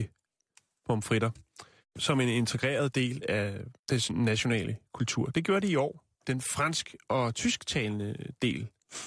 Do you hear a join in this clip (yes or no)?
yes